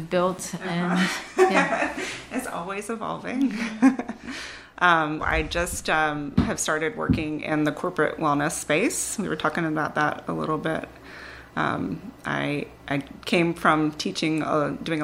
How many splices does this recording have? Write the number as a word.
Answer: one